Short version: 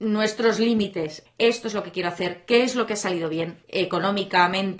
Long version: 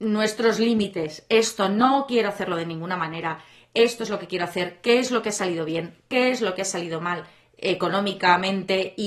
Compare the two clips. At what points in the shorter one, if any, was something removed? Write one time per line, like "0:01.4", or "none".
0:01.3
0:03.6